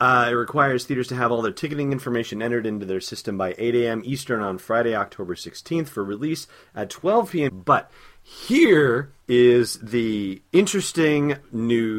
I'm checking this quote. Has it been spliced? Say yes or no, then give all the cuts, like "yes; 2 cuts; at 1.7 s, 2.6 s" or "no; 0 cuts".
yes; 2 cuts; at 7.5 s, 9.2 s